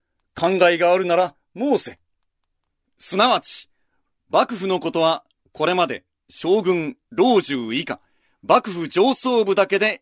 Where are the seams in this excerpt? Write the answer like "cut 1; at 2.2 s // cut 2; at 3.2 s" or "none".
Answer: none